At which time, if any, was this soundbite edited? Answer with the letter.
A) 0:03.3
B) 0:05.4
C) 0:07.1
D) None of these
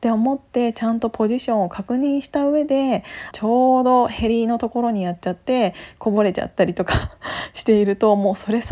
A